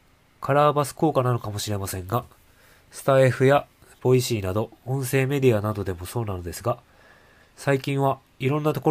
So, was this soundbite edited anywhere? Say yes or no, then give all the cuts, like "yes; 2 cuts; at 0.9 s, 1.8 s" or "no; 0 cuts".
no; 0 cuts